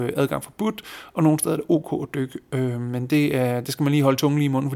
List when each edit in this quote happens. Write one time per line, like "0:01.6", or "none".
none